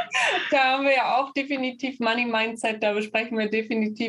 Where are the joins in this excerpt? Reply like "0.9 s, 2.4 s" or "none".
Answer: none

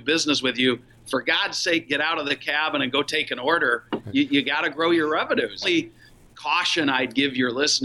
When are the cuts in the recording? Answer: 5.6 s

